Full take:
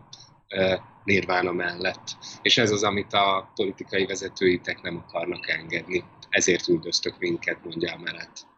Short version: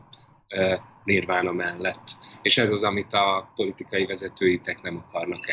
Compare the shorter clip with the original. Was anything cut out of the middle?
no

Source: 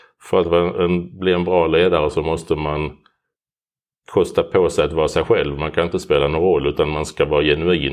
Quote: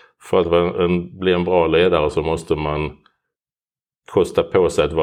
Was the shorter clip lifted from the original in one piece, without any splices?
yes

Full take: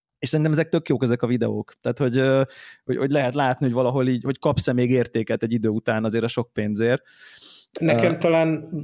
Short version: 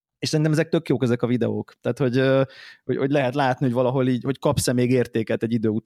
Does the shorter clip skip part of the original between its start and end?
no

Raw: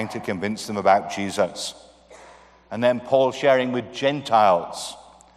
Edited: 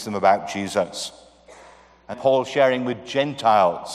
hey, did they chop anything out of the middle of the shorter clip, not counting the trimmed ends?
yes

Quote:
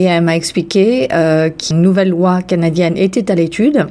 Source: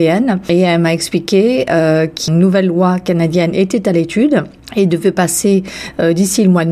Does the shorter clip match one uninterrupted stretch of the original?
yes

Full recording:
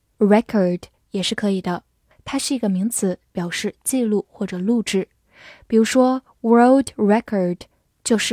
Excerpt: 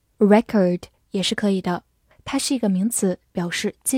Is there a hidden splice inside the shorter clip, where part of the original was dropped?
no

